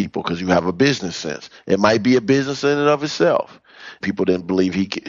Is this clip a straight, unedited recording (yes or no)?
no